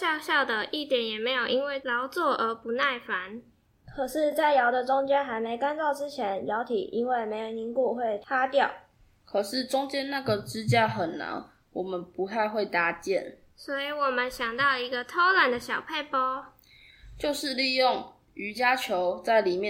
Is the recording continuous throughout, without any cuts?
yes; 0 cuts

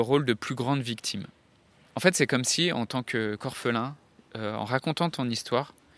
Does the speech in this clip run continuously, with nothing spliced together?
yes; 0 cuts

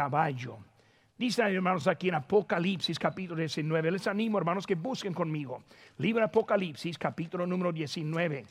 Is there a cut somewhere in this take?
no; 0 cuts

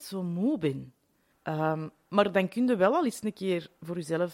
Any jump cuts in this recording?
yes; 1 cut; at 1.3 s

